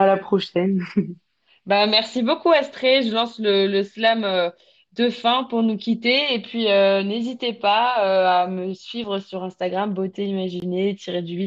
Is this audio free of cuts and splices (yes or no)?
yes